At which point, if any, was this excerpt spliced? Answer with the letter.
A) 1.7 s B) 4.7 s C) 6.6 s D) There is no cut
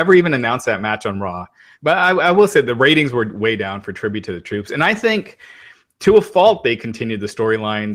A